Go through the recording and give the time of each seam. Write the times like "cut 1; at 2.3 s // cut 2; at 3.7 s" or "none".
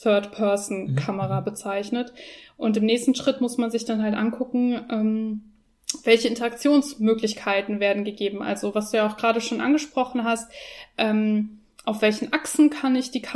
none